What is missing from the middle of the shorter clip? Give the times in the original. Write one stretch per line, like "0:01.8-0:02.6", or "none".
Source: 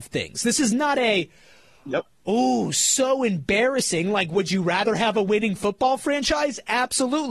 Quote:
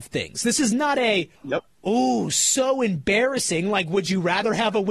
0:01.4-0:01.8